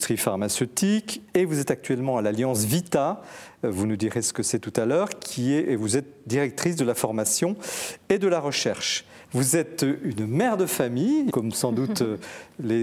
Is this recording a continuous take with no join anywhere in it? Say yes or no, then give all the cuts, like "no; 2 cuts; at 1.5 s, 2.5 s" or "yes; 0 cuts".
no; 2 cuts; at 9.2 s, 11.3 s